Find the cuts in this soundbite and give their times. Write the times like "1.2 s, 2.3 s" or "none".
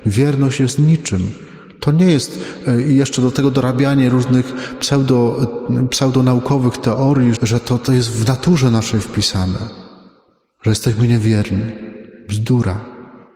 7.4 s